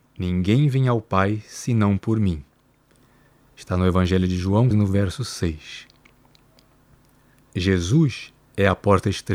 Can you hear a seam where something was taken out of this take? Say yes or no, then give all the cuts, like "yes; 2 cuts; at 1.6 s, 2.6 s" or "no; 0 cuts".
yes; 1 cut; at 4.7 s